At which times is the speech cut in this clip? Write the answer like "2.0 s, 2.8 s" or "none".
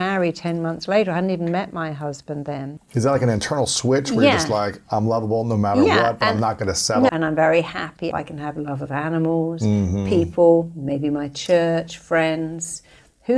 7.1 s, 8.1 s